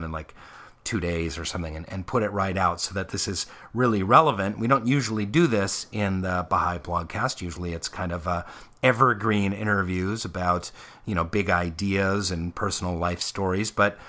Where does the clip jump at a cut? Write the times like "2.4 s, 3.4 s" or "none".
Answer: none